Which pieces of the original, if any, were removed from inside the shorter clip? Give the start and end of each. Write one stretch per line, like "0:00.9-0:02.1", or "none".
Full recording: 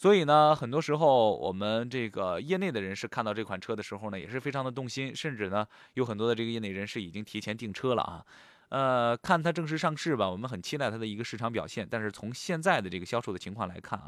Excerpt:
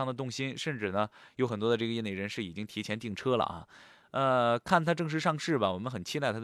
none